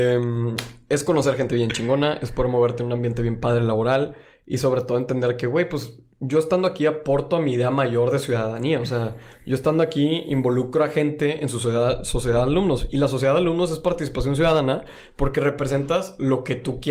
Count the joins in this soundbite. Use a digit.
0